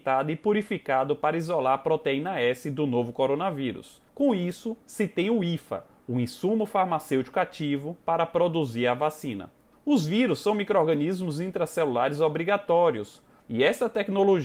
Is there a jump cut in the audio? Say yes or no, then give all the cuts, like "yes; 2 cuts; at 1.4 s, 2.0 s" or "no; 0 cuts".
yes; 1 cut; at 13.4 s